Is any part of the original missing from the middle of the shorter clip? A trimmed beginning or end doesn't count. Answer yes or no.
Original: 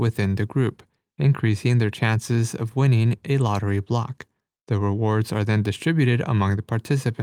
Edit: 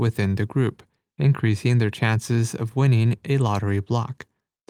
no